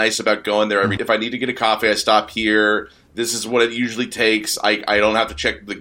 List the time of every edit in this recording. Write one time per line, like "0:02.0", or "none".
0:01.0